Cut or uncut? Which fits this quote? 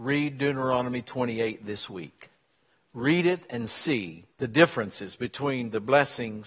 cut